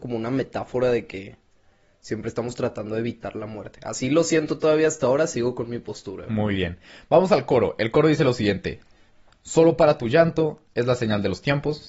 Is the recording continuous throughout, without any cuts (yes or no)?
yes